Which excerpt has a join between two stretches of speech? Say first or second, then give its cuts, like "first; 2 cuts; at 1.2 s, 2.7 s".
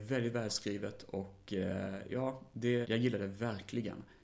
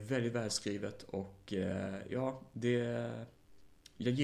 first; 1 cut; at 2.8 s